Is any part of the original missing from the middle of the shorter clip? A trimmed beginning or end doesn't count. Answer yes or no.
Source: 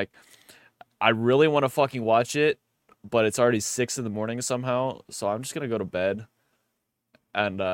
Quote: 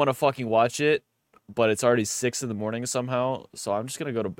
no